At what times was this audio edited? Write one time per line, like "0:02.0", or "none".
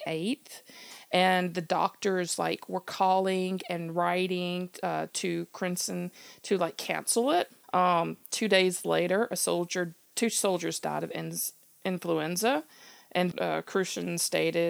0:07.6
0:13.3